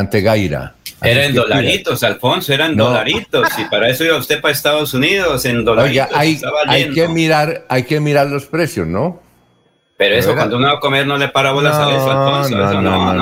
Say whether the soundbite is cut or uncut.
uncut